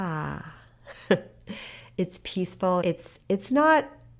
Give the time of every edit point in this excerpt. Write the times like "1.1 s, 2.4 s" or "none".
2.8 s